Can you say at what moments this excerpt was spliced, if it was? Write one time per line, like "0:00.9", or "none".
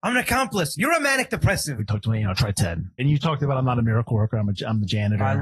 0:01.8
0:03.0

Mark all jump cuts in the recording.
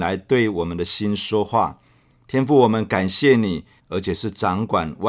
0:03.8

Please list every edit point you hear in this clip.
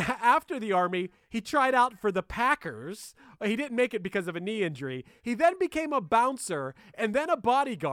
none

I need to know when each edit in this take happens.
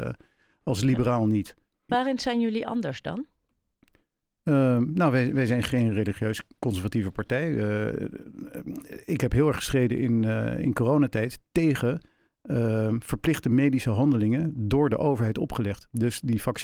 0:01.9

